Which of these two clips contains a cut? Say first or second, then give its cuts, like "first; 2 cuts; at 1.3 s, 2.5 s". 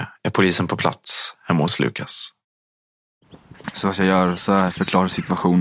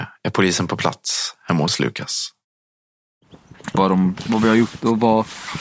second; 1 cut; at 3.7 s